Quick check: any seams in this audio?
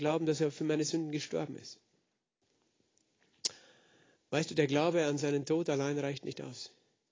no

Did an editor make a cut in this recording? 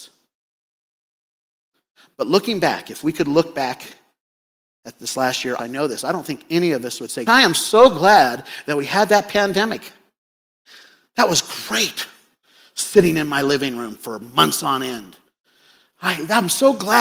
yes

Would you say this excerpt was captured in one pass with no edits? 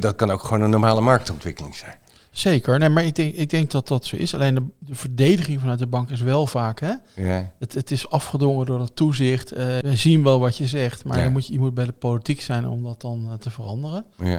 no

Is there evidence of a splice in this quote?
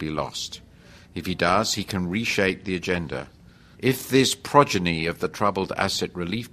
yes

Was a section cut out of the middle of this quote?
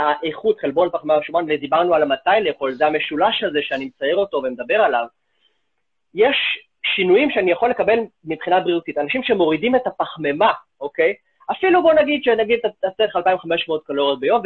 no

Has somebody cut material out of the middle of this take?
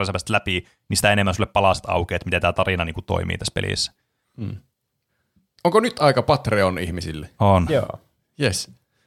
yes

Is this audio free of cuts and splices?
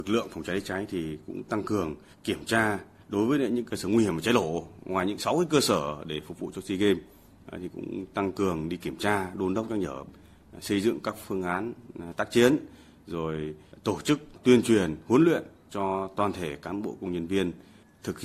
yes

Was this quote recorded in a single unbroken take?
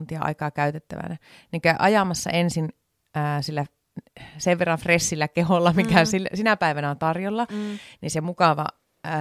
yes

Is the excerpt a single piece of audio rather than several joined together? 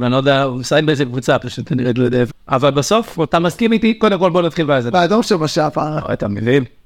no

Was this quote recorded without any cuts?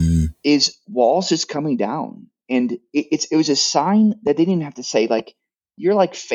yes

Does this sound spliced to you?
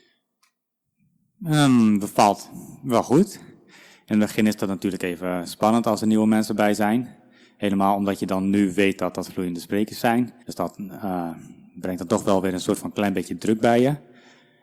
yes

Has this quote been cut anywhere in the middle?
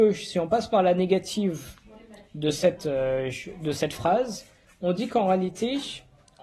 no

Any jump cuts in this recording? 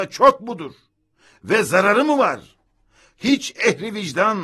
no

